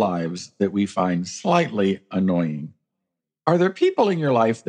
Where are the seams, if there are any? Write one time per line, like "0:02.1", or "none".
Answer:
none